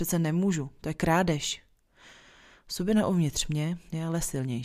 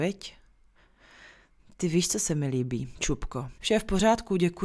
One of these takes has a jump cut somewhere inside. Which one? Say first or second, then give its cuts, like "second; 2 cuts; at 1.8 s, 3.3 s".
second; 1 cut; at 3.6 s